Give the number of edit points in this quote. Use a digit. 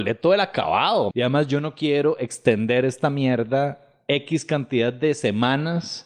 1